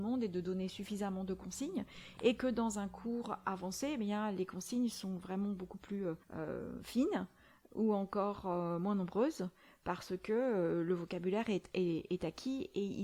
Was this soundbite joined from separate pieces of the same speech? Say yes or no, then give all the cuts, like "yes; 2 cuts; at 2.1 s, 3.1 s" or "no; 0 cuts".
yes; 1 cut; at 6.2 s